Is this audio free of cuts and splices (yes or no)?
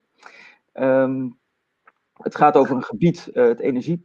yes